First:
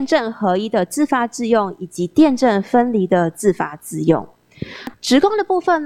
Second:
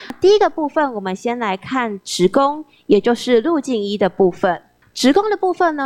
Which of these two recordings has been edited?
first; 1 cut; at 4.9 s

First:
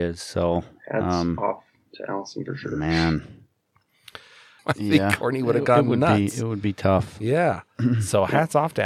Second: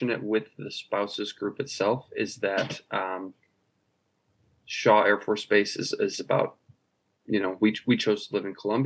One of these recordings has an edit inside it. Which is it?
first; 1 cut; at 4.6 s

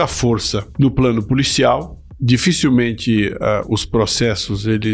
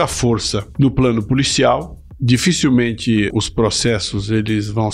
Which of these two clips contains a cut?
second; 1 cut; at 3.3 s

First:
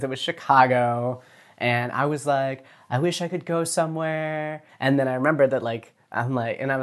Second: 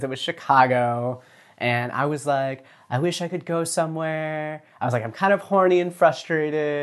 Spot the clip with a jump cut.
first; 1 cut; at 4.7 s

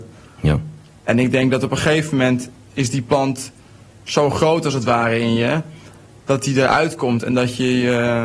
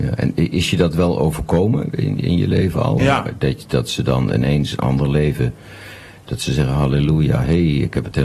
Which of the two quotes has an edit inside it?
second; 1 cut; at 3.0 s

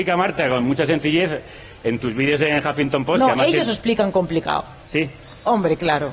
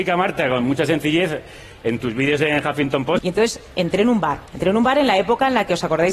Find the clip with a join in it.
second; 2 cuts; at 3.2 s, 4.5 s

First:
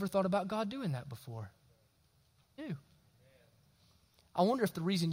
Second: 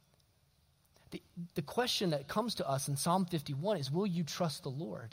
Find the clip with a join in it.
first; 1 cut; at 2.6 s

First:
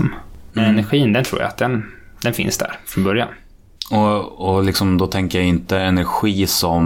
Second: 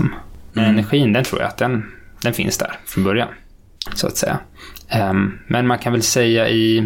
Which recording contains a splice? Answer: second; 1 cut; at 3.9 s

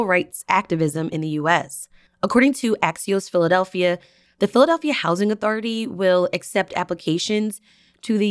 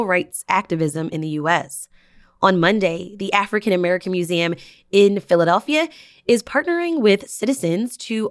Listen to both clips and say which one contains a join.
first; 1 cut; at 2.1 s

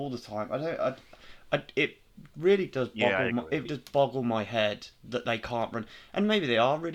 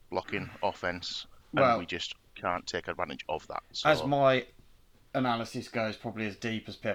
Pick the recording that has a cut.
first; 1 cut; at 3.7 s

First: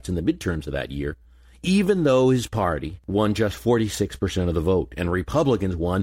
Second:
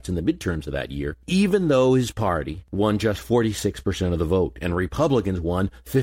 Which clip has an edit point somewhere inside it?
second; 1 cut; at 1.2 s

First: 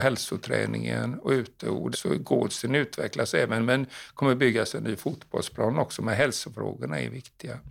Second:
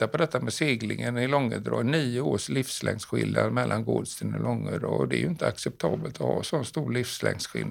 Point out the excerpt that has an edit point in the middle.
first; 1 cut; at 1.9 s

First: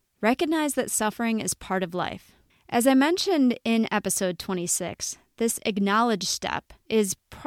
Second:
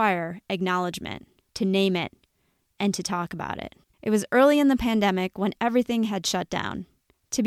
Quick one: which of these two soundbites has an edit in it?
second; 2 cuts; at 1.5 s, 3.9 s

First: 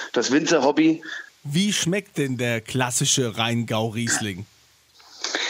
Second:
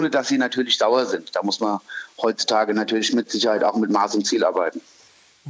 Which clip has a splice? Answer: first; 1 cut; at 1.3 s

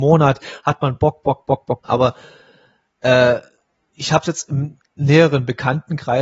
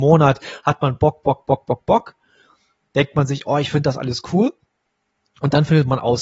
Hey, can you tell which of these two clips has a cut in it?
first; 1 cut; at 1.8 s

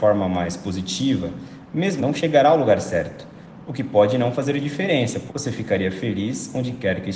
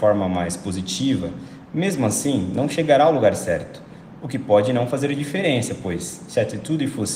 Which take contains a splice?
first; 2 cuts; at 2.0 s, 5.3 s

